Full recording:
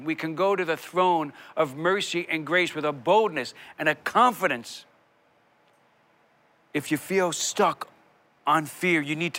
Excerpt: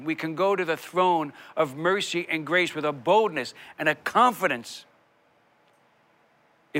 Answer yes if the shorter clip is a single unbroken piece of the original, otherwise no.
yes